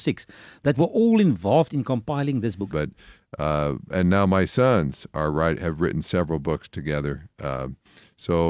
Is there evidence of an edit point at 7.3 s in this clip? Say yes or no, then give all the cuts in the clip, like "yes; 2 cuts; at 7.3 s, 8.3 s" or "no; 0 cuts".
no; 1 cut; at 2.7 s